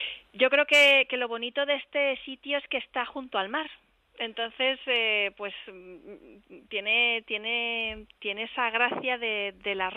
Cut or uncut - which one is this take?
uncut